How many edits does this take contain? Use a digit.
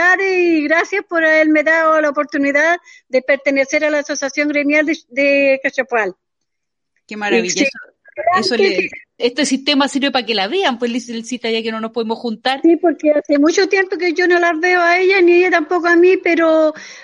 1